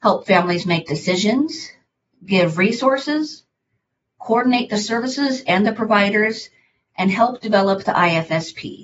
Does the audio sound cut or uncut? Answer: uncut